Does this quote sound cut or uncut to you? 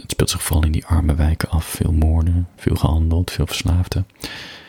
uncut